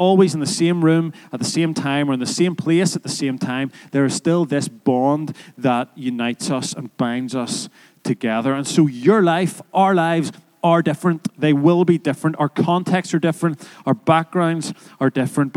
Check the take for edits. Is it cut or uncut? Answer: uncut